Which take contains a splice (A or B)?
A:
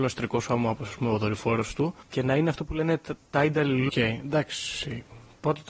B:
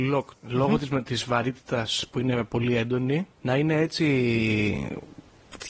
A